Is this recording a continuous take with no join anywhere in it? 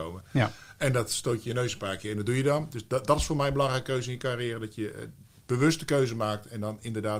yes; 0 cuts

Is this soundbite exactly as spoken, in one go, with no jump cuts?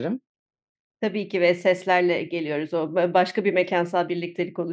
yes; 0 cuts

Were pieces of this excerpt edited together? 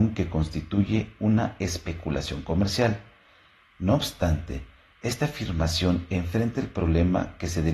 no; 0 cuts

